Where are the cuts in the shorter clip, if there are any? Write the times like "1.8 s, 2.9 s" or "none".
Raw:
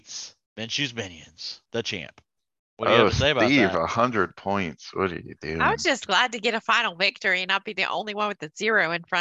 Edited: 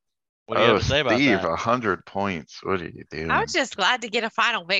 none